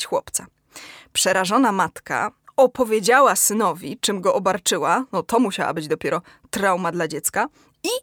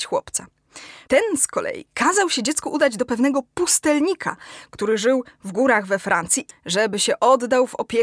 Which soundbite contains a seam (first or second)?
second